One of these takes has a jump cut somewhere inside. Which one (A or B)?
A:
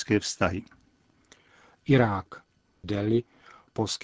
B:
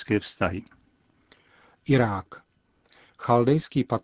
A